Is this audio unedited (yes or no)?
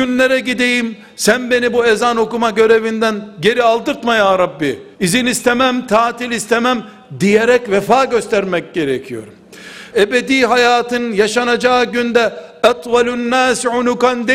no